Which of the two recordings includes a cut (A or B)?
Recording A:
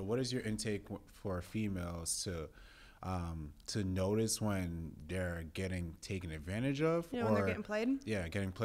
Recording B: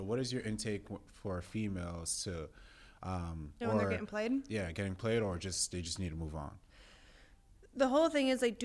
B